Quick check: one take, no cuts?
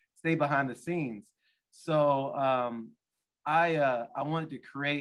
yes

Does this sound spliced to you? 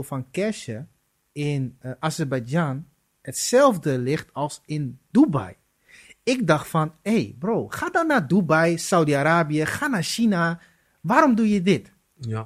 no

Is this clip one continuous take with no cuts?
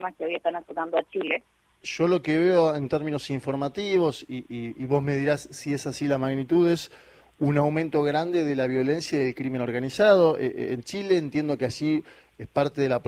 no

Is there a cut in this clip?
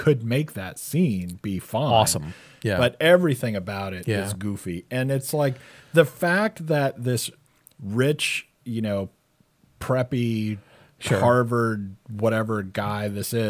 no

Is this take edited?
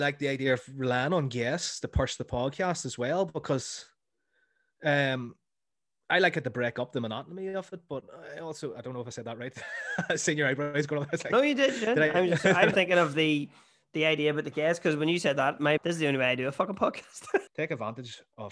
yes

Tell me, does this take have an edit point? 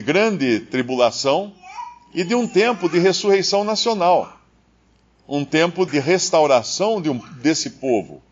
yes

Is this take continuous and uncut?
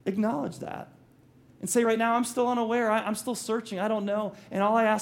yes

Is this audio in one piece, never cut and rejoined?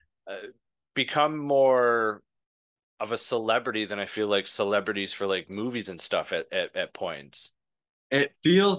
yes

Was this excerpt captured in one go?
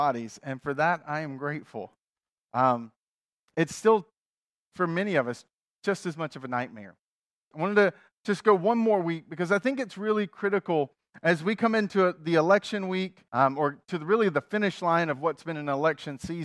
no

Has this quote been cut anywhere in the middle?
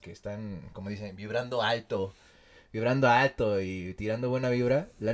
no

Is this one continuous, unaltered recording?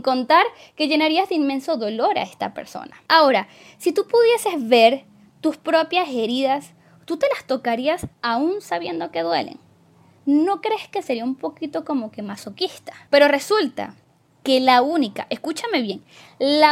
yes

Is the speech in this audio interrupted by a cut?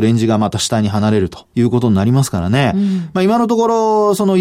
yes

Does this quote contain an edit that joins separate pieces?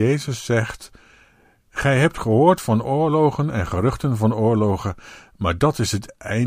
no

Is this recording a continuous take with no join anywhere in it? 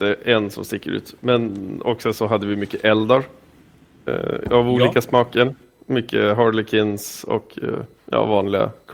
yes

